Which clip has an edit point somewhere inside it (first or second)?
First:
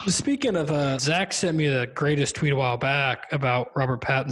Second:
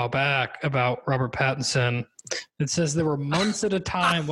first